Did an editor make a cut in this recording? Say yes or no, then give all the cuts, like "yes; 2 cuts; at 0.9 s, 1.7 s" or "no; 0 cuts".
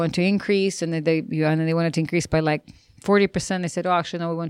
no; 0 cuts